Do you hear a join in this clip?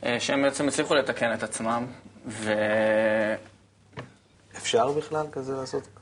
yes; 1 cut; at 4.3 s

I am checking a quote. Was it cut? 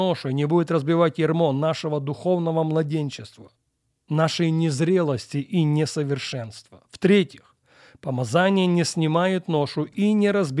no; 0 cuts

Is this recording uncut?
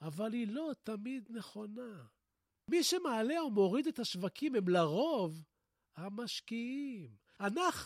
yes; 0 cuts

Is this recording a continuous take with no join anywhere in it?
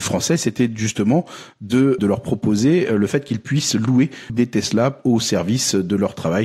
no; 2 cuts; at 2.0 s, 4.3 s

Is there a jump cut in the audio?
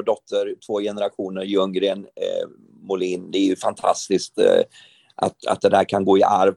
no; 0 cuts

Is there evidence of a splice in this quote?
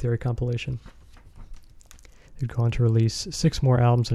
yes; 1 cut; at 2.3 s

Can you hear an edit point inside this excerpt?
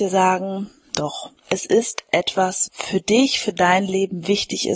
yes; 2 cuts; at 1.4 s, 2.7 s

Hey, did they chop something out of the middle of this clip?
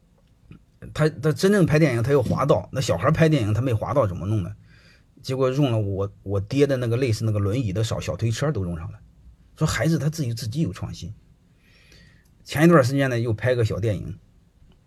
no; 0 cuts

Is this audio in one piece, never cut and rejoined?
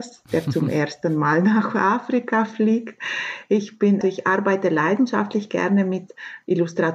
no; 1 cut; at 4.0 s

